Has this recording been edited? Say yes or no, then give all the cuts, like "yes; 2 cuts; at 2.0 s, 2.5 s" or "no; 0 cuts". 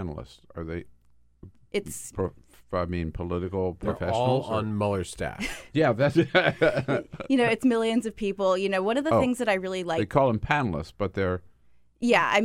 no; 0 cuts